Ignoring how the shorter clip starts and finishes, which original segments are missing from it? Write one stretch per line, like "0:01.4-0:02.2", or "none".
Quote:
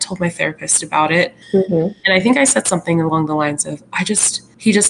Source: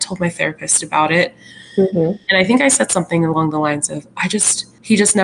0:01.4-0:01.7